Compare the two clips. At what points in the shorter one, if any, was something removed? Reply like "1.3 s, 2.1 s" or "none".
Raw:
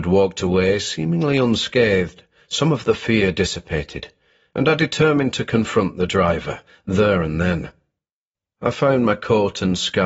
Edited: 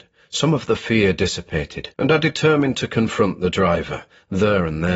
1.9 s